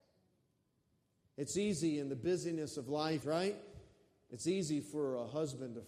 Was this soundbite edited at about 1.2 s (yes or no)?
no